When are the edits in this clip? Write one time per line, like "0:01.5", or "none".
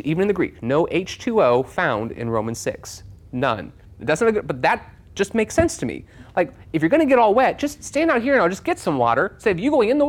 0:03.8